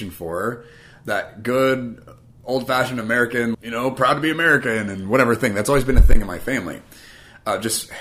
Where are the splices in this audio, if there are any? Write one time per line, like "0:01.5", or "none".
0:03.5